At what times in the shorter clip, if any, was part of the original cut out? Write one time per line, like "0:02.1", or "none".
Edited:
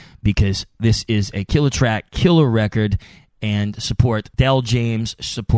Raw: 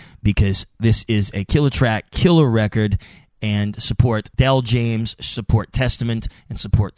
none